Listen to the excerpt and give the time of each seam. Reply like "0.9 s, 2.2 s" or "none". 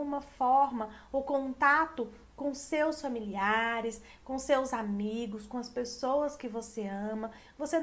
none